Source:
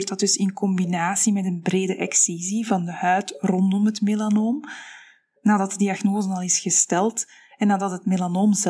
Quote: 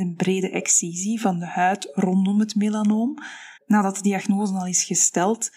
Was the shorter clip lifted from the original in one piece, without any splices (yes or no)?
no